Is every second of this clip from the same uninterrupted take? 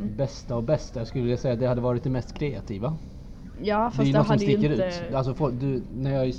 yes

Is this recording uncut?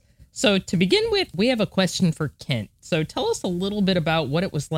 yes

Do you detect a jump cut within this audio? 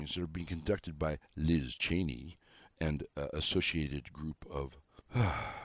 no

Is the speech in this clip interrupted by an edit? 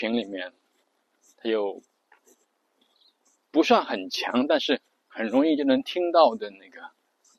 no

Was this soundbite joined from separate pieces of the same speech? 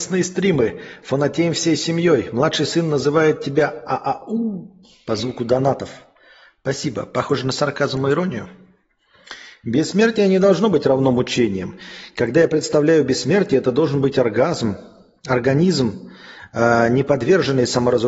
no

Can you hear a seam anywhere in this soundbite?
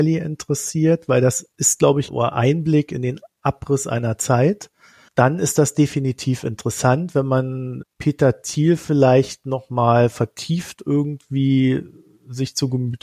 yes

